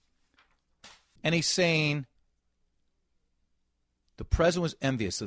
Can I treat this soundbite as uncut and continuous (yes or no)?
no